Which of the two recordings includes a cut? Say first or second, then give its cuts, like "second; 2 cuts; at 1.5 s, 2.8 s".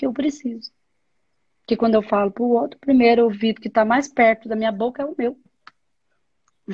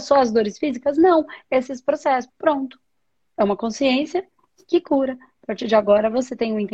second; 1 cut; at 2.3 s